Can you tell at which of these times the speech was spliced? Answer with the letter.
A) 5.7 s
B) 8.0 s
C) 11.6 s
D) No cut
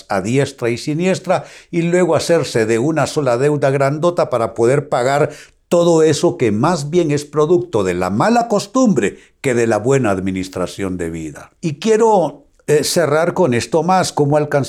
C